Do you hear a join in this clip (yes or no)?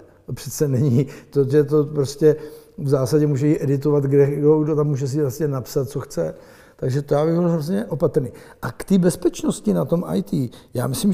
yes